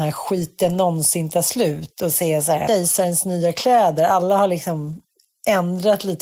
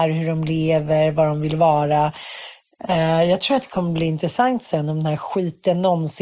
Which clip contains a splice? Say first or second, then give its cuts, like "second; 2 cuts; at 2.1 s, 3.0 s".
first; 1 cut; at 2.7 s